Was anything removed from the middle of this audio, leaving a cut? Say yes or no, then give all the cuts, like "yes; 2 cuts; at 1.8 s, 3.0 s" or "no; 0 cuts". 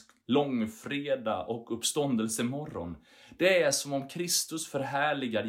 no; 0 cuts